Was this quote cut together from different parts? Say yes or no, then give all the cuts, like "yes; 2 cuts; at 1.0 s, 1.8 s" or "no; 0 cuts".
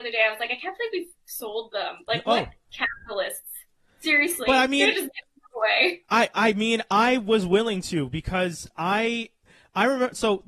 no; 0 cuts